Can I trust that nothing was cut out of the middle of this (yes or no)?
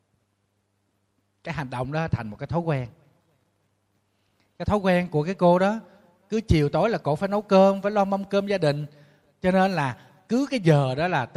yes